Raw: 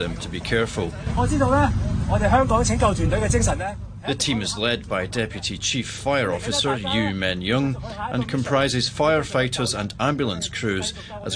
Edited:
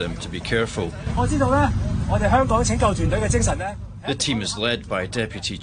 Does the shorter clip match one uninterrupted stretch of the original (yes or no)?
yes